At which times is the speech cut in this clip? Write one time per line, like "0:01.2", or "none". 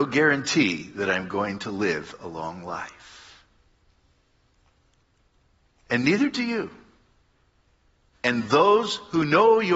0:08.1